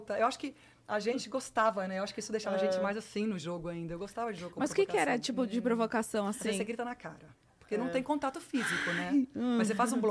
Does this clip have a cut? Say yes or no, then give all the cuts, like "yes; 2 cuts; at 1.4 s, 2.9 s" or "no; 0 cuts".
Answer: no; 0 cuts